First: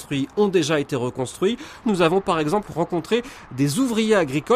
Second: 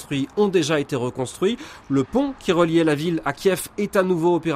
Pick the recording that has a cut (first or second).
first